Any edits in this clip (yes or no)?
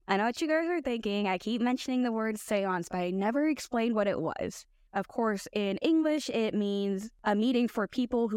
yes